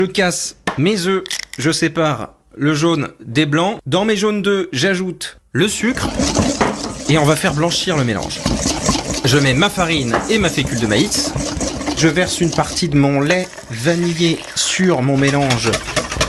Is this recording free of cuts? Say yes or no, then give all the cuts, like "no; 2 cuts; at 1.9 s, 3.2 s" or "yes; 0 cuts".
yes; 0 cuts